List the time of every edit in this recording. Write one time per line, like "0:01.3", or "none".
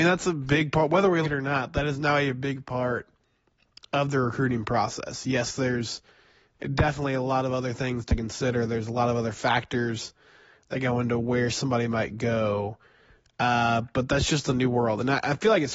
0:01.2